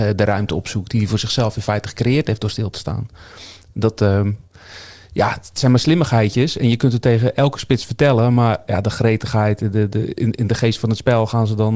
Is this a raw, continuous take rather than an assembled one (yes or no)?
yes